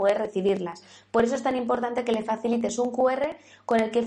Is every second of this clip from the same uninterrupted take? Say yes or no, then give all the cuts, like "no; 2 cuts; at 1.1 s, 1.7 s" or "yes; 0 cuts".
yes; 0 cuts